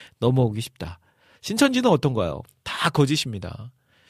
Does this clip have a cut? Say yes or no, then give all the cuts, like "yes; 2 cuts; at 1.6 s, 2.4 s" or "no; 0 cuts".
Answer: no; 0 cuts